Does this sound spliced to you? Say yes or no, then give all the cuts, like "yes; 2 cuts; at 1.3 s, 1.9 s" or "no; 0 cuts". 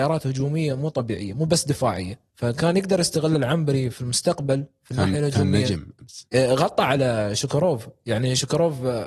yes; 2 cuts; at 2.3 s, 6.3 s